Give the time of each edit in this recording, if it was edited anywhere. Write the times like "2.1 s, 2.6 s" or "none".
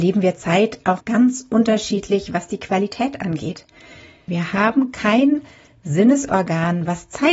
1.0 s, 4.3 s